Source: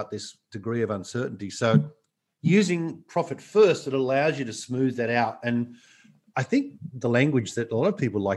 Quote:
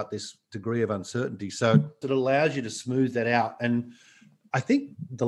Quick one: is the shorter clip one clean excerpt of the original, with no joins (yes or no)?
no